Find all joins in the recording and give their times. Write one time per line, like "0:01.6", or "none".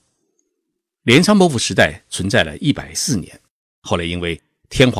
0:02.9